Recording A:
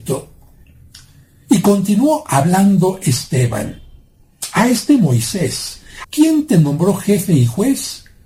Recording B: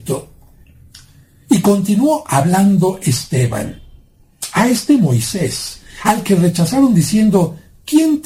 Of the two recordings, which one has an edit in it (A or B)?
A